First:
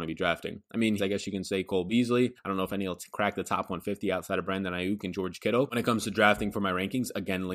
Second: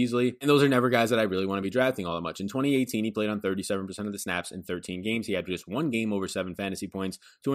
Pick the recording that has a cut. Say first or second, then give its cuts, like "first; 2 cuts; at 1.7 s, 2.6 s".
first; 2 cuts; at 1.0 s, 2.4 s